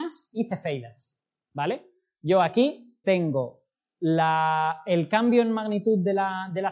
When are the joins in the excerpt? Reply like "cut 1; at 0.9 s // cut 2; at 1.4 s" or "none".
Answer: cut 1; at 3.0 s